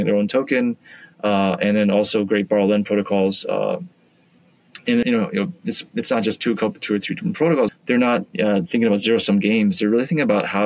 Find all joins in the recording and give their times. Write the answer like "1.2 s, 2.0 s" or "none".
5.0 s, 7.7 s